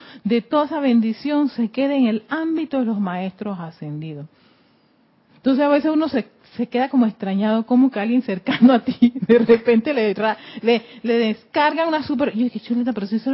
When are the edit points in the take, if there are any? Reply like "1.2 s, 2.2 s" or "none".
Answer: none